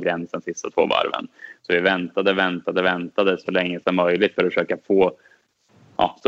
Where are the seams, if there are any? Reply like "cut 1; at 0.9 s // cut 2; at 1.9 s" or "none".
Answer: cut 1; at 1.6 s